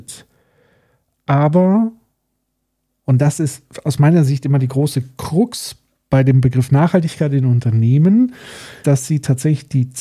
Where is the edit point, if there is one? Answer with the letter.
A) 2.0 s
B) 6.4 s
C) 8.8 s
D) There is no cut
C